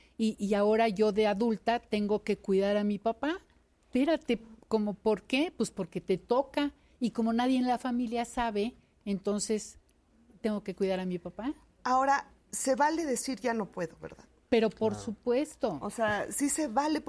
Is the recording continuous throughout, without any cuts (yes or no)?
yes